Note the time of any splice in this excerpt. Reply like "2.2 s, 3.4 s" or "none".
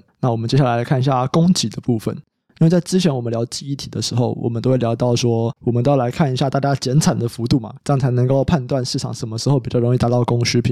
5.6 s, 7.8 s